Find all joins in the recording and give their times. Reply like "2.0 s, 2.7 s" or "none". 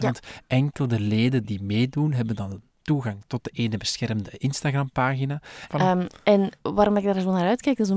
1.4 s, 5.7 s